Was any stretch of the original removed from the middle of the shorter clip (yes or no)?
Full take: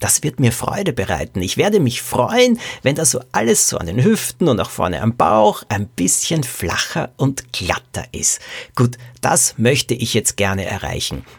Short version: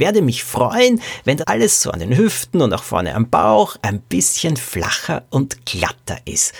yes